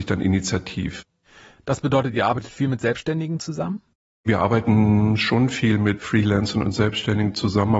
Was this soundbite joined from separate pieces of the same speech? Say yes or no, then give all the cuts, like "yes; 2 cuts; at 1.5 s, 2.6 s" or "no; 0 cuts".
no; 0 cuts